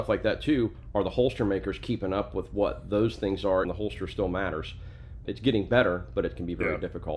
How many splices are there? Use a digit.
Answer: 2